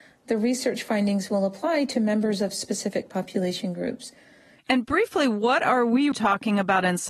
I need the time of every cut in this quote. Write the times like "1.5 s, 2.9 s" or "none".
4.6 s, 6.1 s